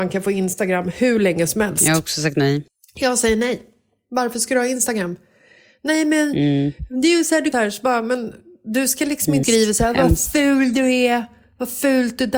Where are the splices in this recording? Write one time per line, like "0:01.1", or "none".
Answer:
0:07.5
0:09.4